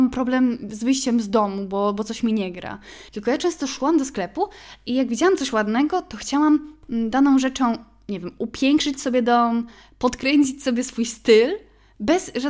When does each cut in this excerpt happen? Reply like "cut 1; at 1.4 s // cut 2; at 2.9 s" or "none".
cut 1; at 3.1 s